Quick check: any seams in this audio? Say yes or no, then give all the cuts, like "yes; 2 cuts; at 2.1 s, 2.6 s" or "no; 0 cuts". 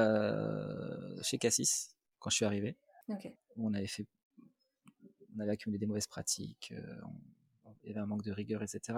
yes; 1 cut; at 3.4 s